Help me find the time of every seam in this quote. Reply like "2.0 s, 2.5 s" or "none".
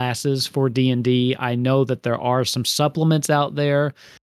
none